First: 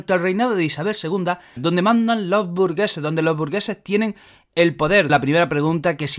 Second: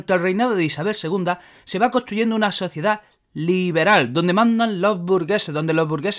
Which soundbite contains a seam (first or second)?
first